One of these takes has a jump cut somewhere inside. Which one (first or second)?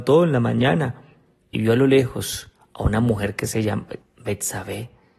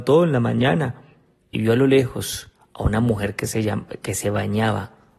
first